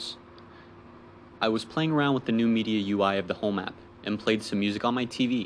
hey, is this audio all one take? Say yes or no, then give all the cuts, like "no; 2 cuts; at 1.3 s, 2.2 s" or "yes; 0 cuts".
yes; 0 cuts